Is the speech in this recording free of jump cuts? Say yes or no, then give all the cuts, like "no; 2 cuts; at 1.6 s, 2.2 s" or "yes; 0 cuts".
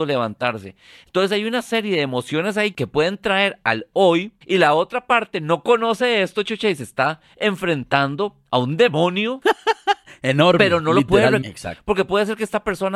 no; 2 cuts; at 4.4 s, 11.4 s